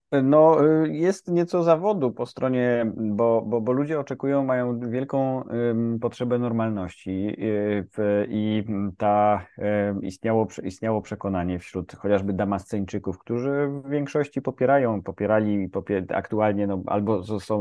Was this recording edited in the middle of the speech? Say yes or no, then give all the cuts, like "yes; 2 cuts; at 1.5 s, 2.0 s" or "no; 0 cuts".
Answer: no; 0 cuts